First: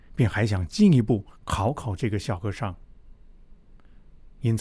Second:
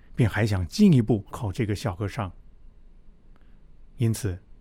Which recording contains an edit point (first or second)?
second